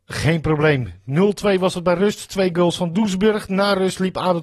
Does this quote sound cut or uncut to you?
uncut